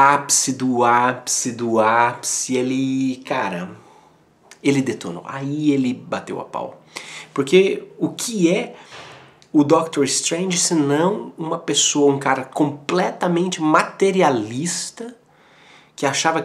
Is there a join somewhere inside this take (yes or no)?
no